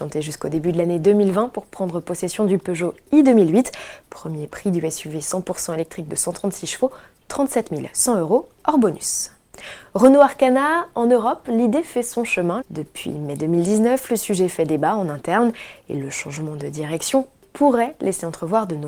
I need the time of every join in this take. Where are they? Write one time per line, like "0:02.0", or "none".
0:12.6